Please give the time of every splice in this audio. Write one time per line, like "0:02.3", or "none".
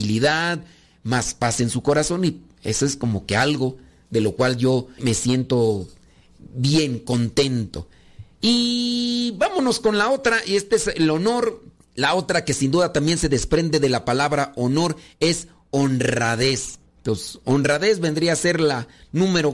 0:05.0

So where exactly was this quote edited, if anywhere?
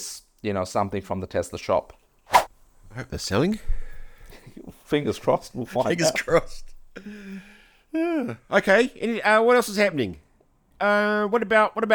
0:10.7

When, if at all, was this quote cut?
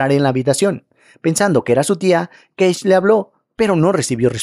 none

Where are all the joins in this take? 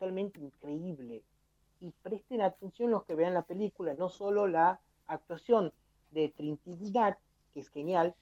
0:01.6

